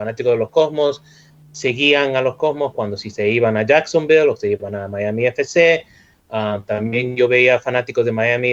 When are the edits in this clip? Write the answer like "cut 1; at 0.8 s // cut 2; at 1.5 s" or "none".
none